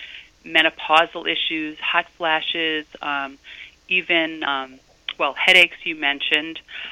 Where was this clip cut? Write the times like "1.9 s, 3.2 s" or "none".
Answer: none